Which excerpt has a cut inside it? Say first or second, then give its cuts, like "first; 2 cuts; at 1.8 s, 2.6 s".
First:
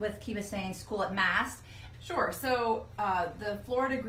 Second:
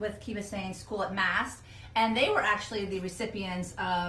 first; 1 cut; at 1.9 s